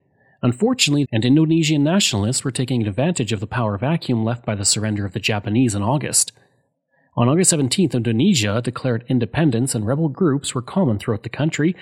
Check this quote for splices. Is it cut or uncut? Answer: cut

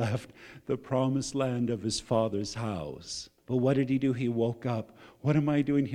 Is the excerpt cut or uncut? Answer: cut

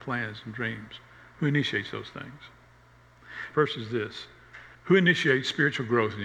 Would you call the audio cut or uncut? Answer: cut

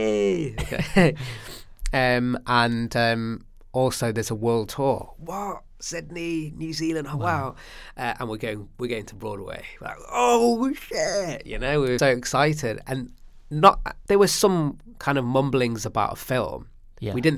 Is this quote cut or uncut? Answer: cut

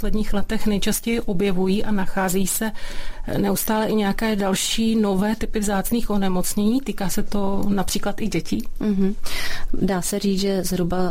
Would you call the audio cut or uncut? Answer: uncut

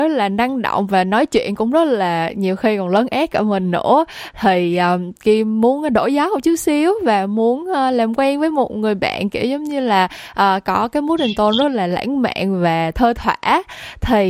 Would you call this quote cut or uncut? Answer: uncut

